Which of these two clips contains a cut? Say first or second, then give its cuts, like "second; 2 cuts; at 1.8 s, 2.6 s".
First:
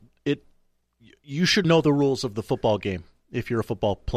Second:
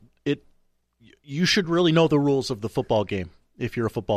first; 1 cut; at 1.6 s